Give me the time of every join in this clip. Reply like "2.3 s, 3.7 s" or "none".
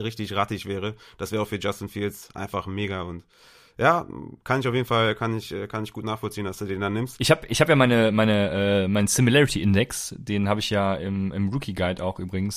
none